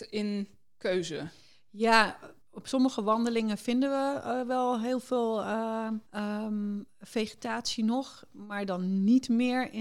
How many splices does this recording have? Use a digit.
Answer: 2